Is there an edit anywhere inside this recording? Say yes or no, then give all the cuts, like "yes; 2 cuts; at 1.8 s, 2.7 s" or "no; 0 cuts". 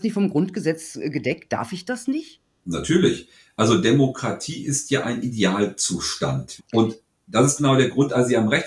yes; 1 cut; at 6.6 s